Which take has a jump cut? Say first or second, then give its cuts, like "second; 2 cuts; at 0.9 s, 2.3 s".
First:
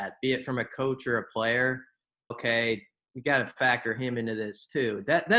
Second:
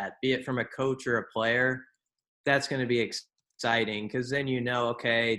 first; 1 cut; at 2.3 s